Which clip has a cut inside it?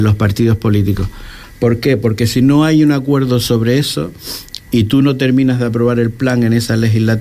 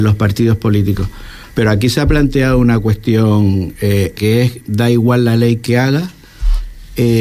second; 2 cuts; at 1.5 s, 4.2 s

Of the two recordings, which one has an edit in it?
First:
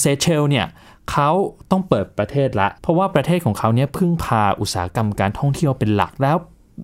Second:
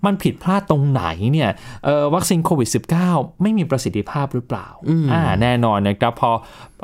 first; 1 cut; at 2.8 s

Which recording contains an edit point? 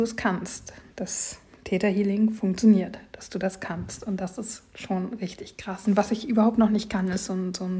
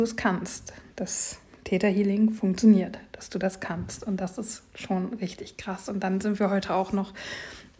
first; 1 cut; at 5.8 s

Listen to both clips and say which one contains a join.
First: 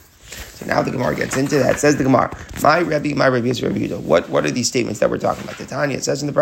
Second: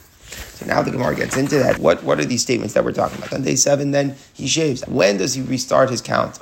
second; 3 cuts; at 1.8 s, 3.3 s, 4.8 s

